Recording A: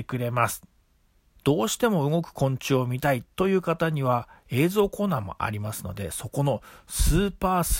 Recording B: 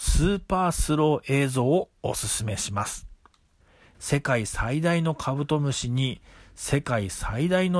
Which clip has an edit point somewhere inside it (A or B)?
B